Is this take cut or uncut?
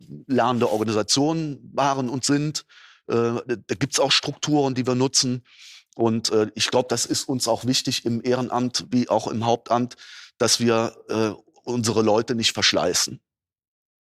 uncut